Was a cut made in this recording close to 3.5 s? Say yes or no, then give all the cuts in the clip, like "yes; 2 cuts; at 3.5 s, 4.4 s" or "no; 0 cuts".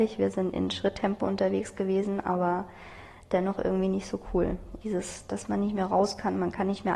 no; 1 cut; at 4.8 s